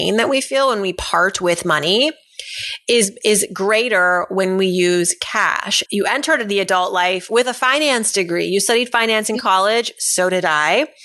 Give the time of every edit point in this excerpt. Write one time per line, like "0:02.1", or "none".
0:05.9